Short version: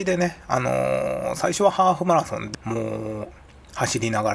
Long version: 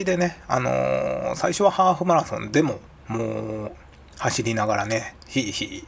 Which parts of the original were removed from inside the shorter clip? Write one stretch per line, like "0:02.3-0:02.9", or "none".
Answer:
0:02.5-0:03.0